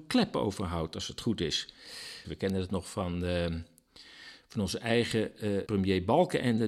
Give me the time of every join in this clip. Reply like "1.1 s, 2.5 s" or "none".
2.2 s, 5.7 s